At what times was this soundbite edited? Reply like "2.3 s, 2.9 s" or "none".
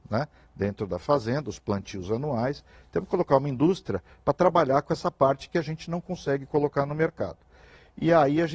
none